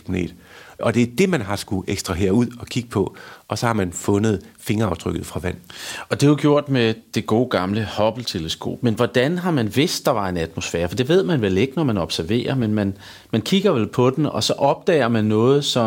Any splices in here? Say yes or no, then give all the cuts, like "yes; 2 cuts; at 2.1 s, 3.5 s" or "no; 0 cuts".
no; 0 cuts